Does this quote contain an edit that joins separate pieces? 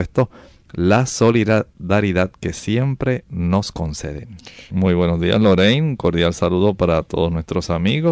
yes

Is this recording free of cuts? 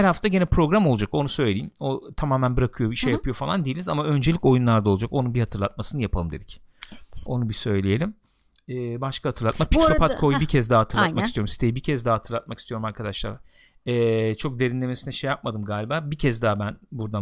yes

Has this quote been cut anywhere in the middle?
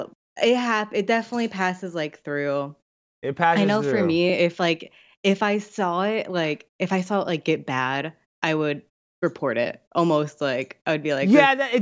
no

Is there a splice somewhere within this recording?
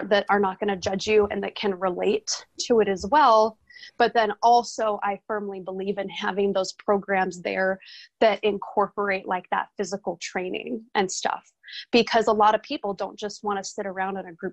no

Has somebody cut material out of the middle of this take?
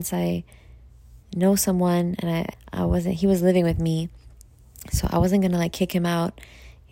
yes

